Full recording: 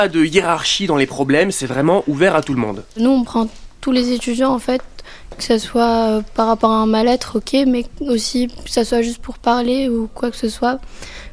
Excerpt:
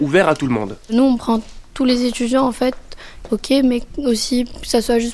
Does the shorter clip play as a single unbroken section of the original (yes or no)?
no